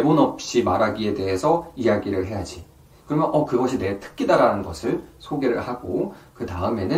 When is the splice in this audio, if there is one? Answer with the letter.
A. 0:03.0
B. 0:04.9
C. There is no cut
A